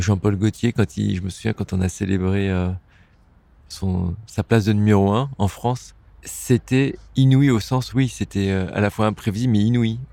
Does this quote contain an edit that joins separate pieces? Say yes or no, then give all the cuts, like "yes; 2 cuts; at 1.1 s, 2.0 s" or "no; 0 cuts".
no; 0 cuts